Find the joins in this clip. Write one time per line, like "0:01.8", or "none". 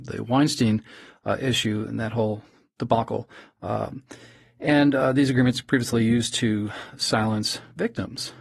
none